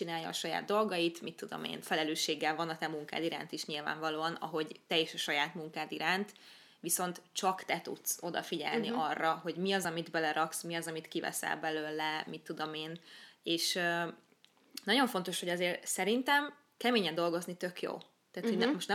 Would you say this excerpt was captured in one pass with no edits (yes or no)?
yes